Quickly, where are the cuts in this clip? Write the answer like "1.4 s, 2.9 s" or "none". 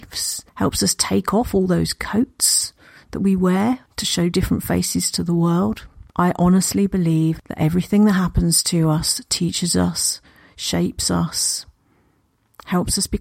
3.9 s, 6.1 s